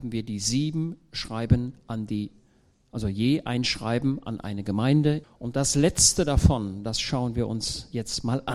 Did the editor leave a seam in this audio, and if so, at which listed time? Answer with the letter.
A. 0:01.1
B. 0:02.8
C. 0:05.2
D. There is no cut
C